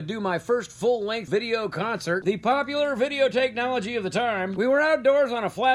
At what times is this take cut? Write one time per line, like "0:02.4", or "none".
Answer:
0:02.2